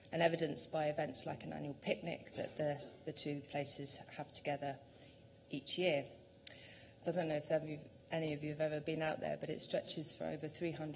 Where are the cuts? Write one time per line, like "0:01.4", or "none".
0:07.0

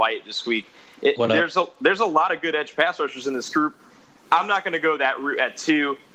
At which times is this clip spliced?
none

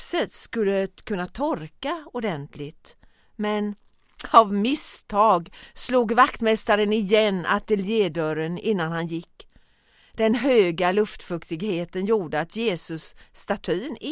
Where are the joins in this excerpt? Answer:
none

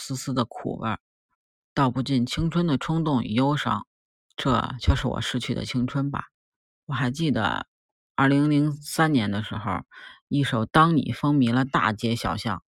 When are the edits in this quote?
none

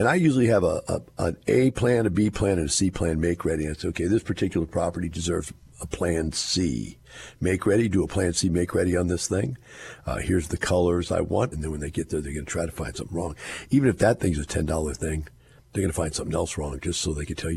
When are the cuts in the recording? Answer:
0:11.5

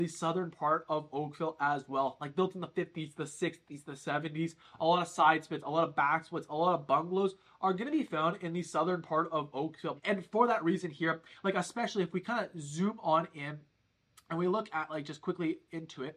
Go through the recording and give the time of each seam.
0:10.0

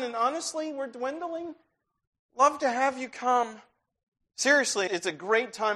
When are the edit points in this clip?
0:04.9

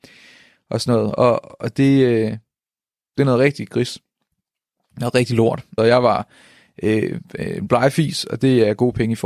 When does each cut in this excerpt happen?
0:05.8

